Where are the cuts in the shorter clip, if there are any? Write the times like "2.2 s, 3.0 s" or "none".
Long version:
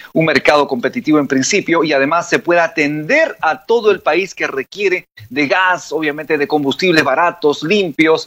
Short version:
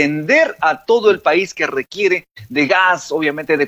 none